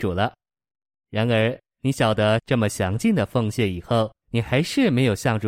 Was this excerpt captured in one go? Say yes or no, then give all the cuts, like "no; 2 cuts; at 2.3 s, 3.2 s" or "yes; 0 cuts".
no; 2 cuts; at 2.4 s, 4.2 s